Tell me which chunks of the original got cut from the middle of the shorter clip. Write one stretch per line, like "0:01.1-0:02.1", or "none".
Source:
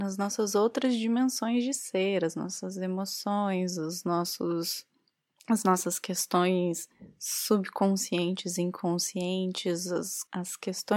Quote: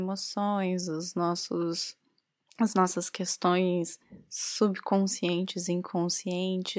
none